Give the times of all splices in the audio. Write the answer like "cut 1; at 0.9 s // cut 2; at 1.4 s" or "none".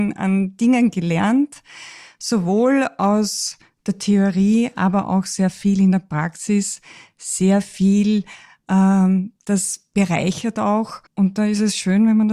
cut 1; at 11.1 s